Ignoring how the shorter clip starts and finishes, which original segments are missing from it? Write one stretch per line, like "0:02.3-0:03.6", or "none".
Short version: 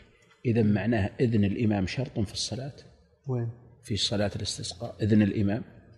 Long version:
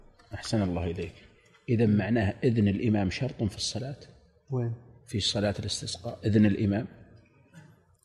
none